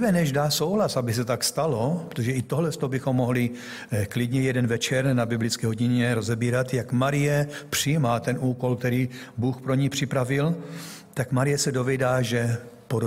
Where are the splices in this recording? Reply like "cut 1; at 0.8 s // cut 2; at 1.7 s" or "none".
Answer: none